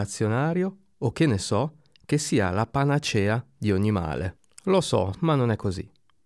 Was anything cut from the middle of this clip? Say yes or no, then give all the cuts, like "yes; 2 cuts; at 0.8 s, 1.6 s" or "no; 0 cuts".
yes; 1 cut; at 5.1 s